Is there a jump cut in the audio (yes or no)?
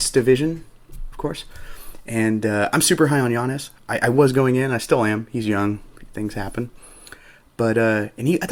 no